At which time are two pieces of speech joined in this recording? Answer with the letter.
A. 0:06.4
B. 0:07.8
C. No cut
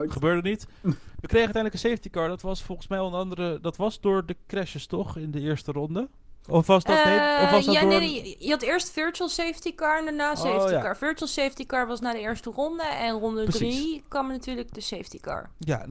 A